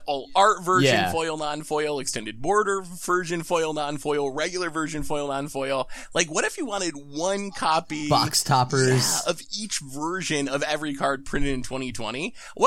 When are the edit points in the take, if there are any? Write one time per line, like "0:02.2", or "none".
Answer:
none